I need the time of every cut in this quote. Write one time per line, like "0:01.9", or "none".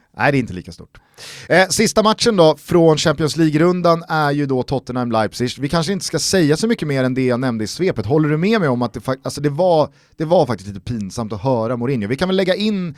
none